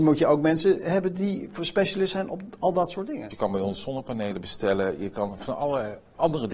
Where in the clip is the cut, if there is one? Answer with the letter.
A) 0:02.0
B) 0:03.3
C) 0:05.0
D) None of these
B